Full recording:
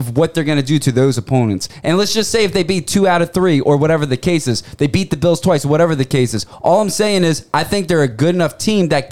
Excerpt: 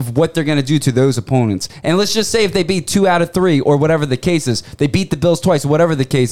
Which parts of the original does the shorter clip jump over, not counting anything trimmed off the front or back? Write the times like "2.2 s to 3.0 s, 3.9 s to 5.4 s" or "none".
none